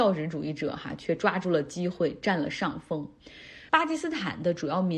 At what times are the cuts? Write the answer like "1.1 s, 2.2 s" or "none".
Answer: 3.7 s